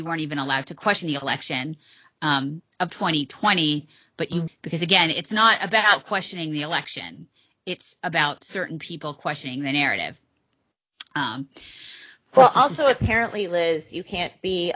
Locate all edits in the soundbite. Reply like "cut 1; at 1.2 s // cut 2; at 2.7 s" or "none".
cut 1; at 4.5 s